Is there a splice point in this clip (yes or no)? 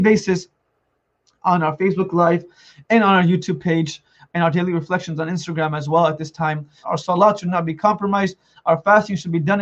yes